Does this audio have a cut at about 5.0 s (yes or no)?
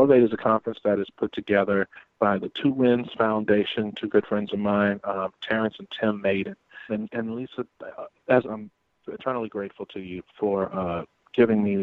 no